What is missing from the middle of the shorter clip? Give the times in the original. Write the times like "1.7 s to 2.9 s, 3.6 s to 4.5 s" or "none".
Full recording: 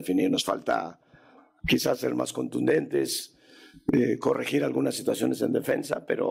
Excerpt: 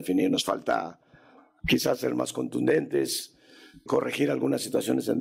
3.9 s to 4.2 s